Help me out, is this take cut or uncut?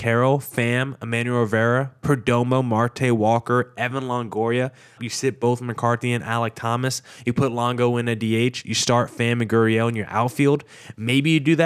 cut